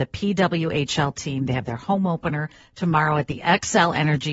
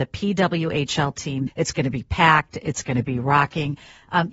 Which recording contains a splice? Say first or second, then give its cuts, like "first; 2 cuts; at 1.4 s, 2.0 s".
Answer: second; 1 cut; at 1.5 s